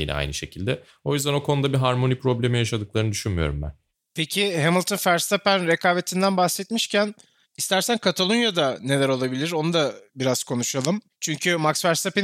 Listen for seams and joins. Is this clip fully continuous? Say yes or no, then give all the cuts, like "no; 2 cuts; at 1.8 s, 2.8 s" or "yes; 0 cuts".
yes; 0 cuts